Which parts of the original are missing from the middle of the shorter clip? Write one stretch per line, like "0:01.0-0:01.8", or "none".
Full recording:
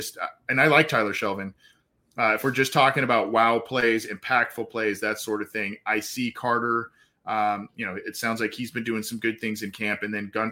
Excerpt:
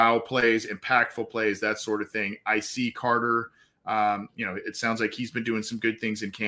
none